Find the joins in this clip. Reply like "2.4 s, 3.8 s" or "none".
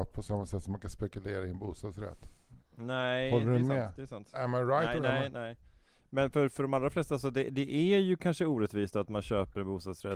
none